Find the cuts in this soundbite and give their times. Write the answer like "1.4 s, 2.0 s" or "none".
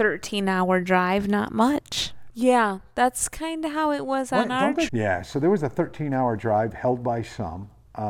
2.3 s, 4.9 s